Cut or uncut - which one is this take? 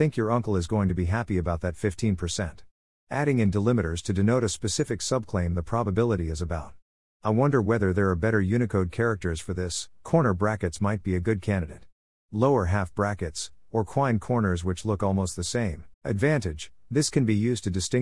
cut